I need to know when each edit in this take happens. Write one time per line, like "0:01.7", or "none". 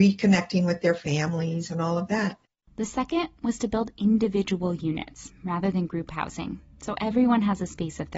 none